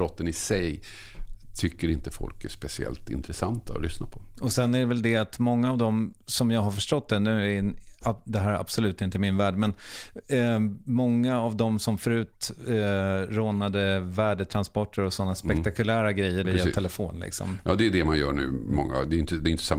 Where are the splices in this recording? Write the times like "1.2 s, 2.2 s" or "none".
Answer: 16.4 s